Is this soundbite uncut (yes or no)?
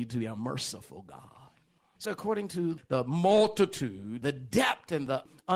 no